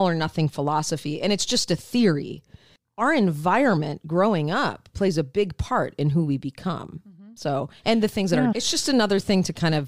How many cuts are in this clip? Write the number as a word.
one